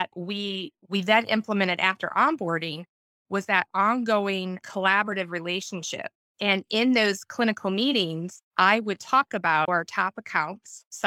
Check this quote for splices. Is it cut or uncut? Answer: cut